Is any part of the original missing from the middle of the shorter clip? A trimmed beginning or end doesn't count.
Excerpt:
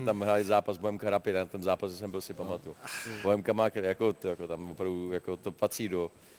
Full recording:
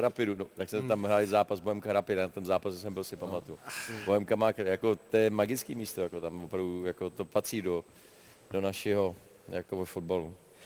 yes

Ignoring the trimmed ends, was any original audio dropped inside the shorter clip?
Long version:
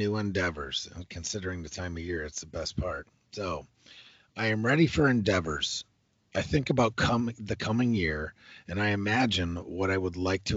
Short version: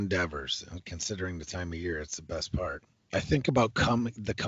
yes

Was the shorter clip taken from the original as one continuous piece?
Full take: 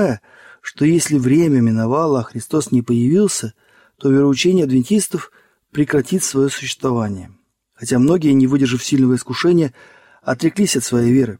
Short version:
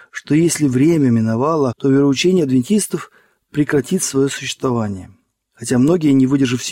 no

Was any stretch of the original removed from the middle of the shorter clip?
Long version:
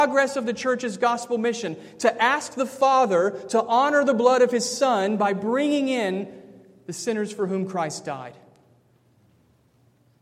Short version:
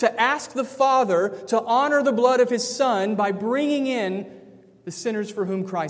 no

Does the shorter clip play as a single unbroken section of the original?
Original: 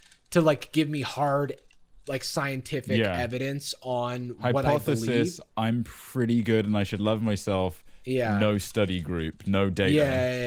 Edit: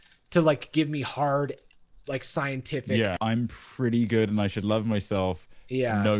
no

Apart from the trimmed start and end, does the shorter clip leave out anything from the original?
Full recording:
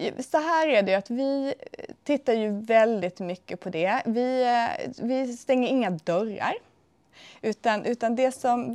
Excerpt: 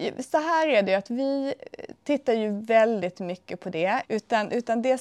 yes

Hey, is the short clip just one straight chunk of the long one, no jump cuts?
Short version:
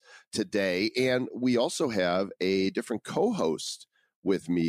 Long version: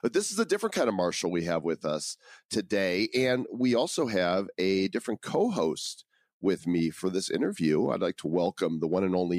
yes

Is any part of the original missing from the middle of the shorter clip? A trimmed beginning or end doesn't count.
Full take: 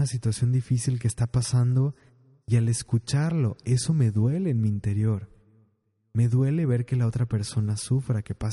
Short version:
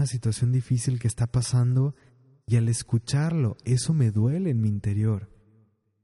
no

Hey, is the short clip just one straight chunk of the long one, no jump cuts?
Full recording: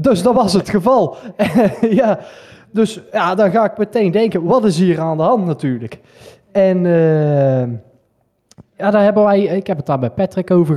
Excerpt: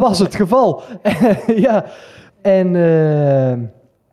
no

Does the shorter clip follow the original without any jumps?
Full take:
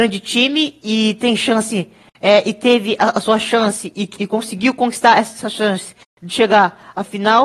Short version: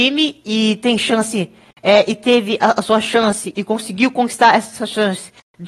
no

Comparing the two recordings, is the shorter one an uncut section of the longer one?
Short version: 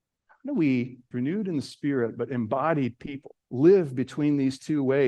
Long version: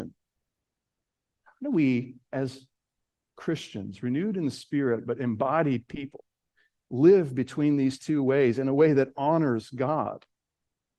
no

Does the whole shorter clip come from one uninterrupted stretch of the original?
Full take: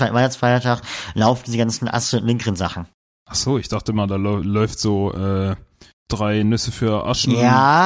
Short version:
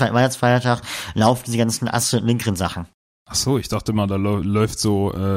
yes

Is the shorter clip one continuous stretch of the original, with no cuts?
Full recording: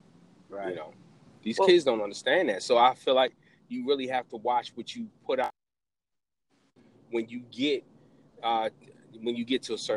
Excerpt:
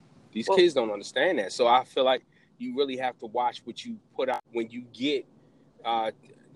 no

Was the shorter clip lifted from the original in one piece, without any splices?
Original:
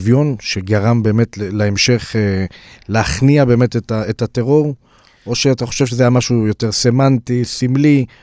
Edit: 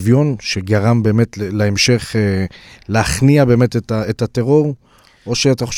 yes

